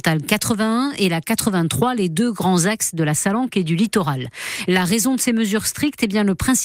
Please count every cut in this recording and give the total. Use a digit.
0